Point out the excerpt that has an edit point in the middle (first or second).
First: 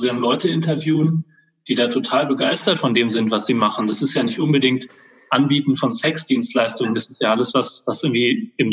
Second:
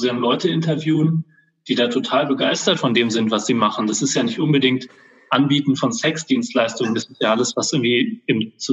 second